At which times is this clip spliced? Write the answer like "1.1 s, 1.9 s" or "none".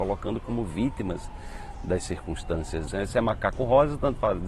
2.9 s